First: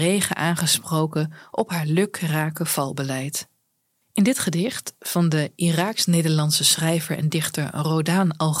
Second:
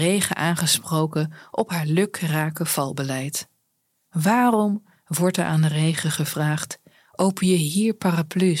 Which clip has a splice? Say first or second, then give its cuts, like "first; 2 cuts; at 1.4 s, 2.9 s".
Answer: first; 1 cut; at 4.0 s